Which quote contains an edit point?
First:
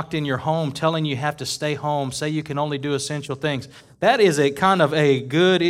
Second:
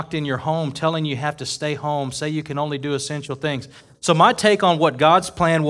second; 1 cut; at 3.9 s

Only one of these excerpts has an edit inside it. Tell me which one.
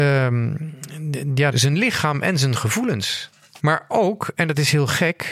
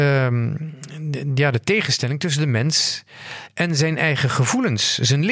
first; 2 cuts; at 1.5 s, 3.6 s

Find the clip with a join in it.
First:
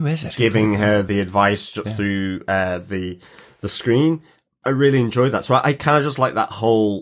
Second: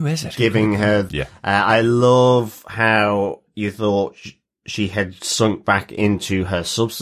second; 1 cut; at 1.1 s

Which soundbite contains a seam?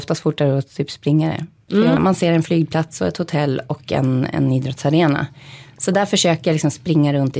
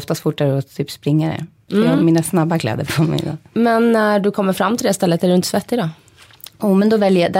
first; 1 cut; at 2.0 s

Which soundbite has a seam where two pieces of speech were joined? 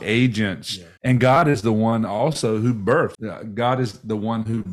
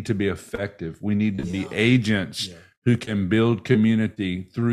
first; 2 cuts; at 1.0 s, 3.1 s

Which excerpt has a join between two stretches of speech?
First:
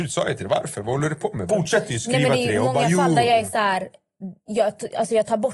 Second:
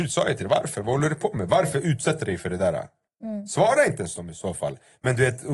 first; 1 cut; at 1.5 s

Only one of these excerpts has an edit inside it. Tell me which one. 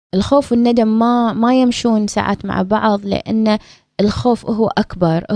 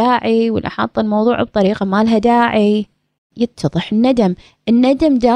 second; 1 cut; at 3.3 s

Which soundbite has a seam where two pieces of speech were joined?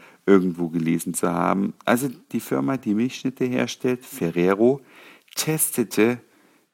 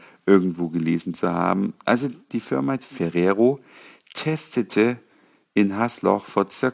second; 1 cut; at 2.8 s

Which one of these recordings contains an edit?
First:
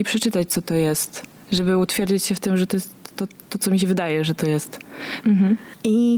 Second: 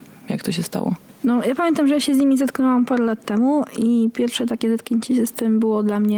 first; 2 cuts; at 3.1 s, 5.2 s

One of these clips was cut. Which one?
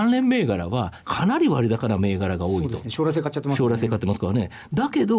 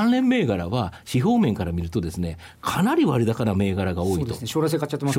first; 1 cut; at 1.0 s

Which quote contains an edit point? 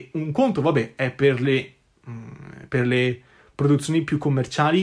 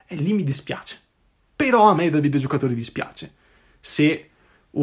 second; 1 cut; at 1.5 s

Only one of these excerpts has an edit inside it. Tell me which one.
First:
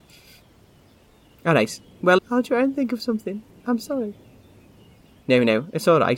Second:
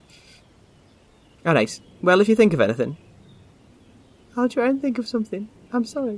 first; 1 cut; at 2.2 s

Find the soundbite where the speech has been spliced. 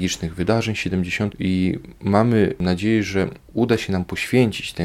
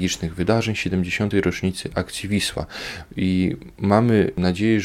first; 2 cuts; at 1.3 s, 3.4 s

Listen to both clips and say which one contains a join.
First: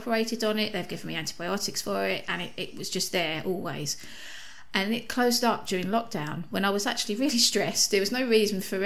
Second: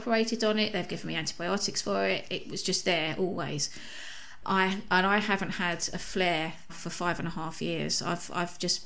second; 3 cuts; at 2.3 s, 4.4 s, 6.7 s

